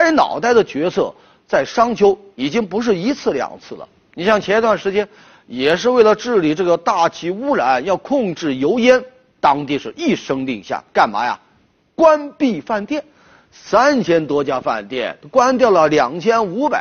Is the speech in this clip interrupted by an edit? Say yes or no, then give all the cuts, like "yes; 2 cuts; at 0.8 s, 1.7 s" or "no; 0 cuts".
no; 0 cuts